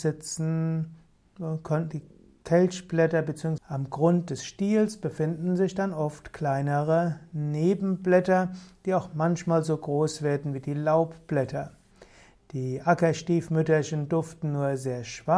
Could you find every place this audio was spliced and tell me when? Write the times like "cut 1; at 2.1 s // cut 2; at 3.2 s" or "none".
cut 1; at 3.6 s